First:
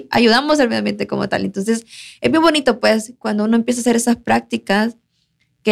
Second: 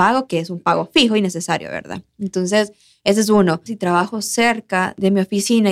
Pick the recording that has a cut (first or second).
second